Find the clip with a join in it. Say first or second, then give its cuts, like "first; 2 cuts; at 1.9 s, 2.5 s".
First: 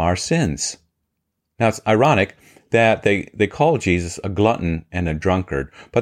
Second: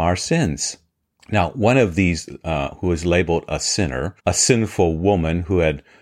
second; 2 cuts; at 1.2 s, 4.2 s